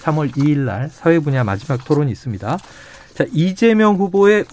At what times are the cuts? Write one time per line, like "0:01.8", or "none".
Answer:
none